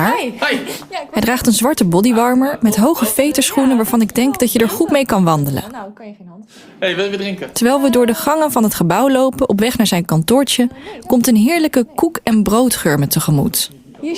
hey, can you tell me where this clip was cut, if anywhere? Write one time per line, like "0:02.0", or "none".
none

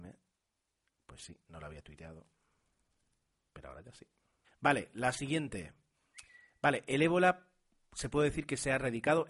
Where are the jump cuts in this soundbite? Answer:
0:04.4

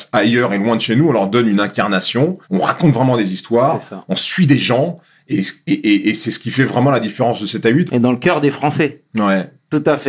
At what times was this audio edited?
0:02.4
0:07.9

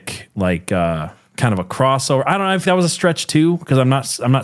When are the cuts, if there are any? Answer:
0:02.6

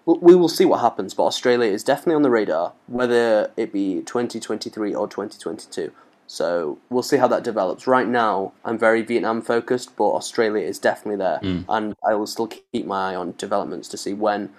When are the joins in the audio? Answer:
0:06.9
0:08.6

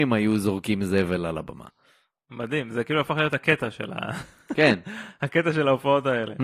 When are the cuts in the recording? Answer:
none

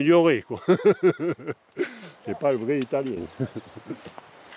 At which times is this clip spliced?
none

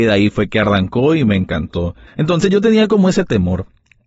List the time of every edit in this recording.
0:02.1

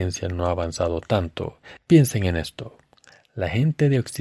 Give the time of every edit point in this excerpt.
0:01.8

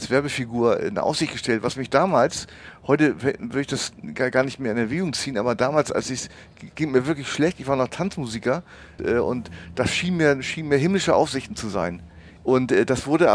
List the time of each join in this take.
0:09.0
0:12.4

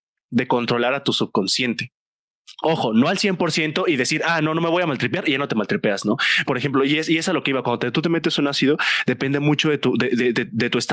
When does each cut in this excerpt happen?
0:06.5

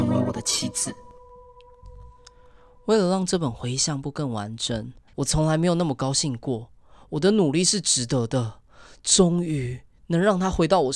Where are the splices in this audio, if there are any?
0:05.1

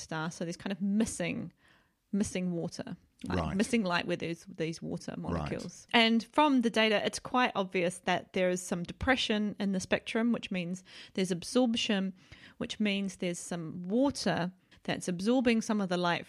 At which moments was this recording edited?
0:05.9
0:14.7

